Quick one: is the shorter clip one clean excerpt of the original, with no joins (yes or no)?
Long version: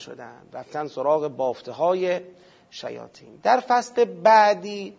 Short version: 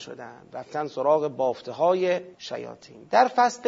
no